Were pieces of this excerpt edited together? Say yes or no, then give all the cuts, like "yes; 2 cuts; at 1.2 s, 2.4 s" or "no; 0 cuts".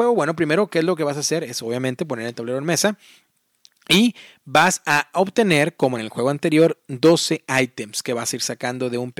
no; 0 cuts